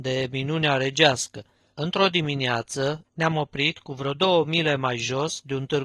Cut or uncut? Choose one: cut